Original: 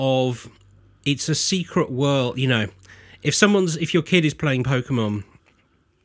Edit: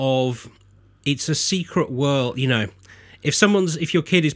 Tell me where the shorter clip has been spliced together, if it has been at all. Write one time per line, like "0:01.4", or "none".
none